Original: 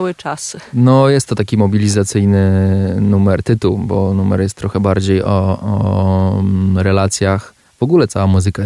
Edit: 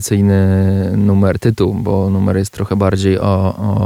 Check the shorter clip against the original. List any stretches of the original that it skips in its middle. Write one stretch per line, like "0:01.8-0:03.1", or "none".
none